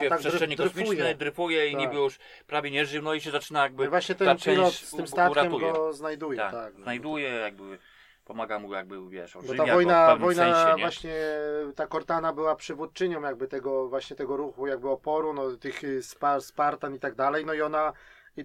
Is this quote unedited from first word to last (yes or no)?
yes